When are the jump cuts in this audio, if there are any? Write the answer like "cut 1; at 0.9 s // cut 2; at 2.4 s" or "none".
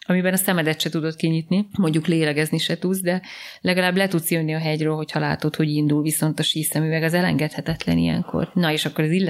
cut 1; at 1.7 s

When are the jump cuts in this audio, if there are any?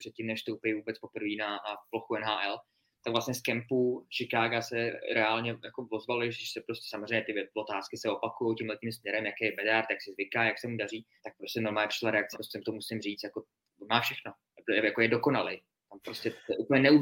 cut 1; at 11.2 s // cut 2; at 12.3 s

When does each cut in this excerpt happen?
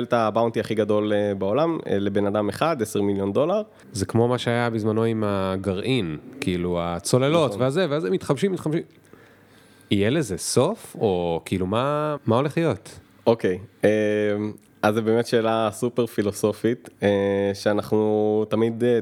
cut 1; at 3.8 s // cut 2; at 12.2 s

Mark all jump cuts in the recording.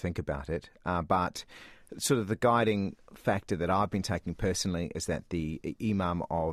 none

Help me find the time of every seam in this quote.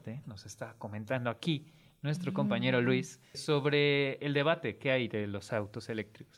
cut 1; at 3.3 s

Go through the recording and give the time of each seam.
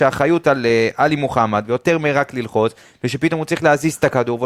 cut 1; at 1.7 s

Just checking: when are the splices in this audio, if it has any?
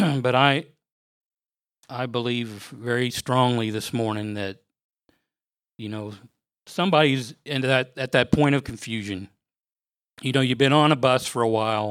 none

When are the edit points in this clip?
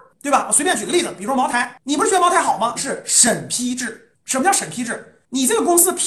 cut 1; at 2.7 s

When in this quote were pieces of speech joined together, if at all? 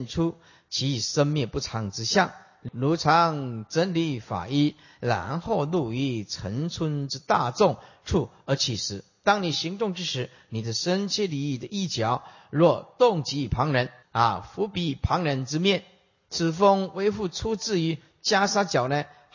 cut 1; at 2.7 s // cut 2; at 14.0 s

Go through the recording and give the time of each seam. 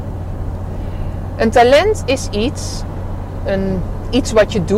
cut 1; at 3.5 s

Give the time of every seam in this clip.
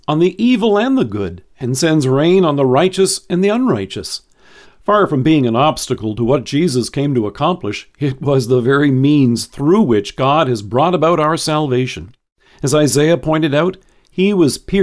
cut 1; at 4.6 s

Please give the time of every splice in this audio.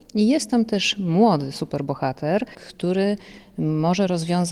cut 1; at 2.5 s

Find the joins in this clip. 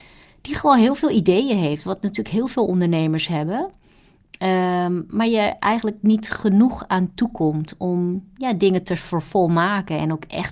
none

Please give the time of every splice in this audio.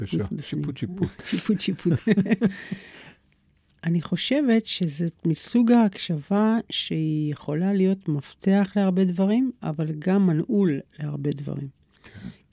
none

